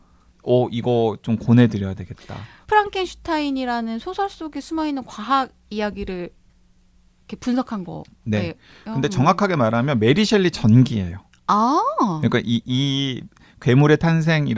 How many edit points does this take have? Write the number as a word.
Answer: one